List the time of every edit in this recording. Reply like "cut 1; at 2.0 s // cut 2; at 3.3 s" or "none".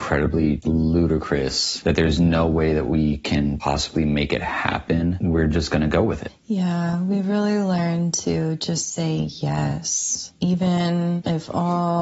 none